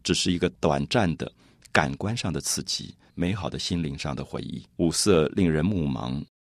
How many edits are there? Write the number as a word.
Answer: two